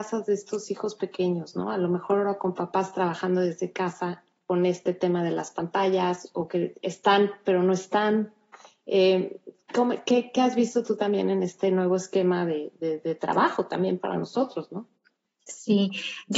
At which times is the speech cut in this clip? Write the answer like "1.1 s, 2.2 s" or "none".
none

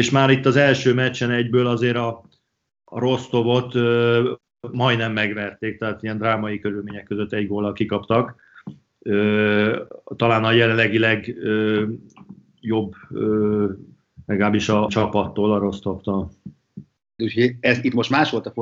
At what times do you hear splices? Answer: 14.9 s, 17.2 s

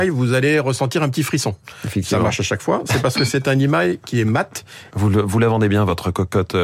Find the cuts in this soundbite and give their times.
4.9 s

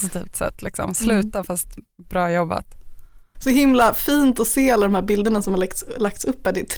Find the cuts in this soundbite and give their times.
3.3 s

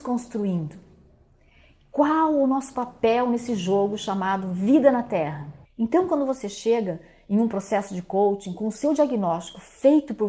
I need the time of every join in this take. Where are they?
5.6 s

